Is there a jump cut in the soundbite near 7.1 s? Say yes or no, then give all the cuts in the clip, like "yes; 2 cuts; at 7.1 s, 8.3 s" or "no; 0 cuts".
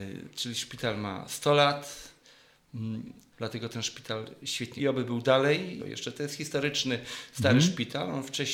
no; 3 cuts; at 3.3 s, 4.8 s, 5.8 s